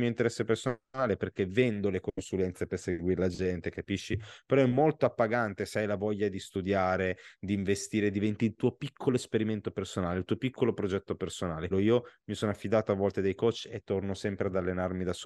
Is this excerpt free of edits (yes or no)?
no